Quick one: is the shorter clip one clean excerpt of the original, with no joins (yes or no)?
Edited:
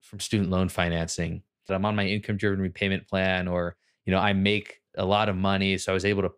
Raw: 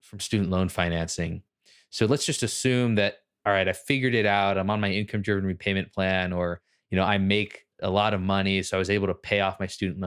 no